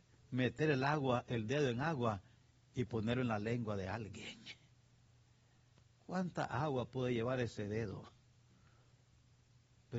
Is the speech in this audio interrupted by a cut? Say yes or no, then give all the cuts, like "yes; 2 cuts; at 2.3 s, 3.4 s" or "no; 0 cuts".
no; 0 cuts